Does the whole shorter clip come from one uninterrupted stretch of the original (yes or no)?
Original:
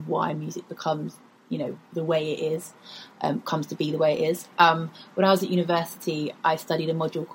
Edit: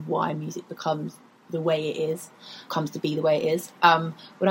no